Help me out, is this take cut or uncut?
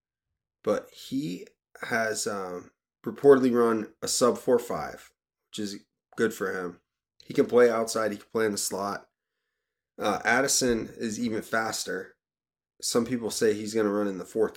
uncut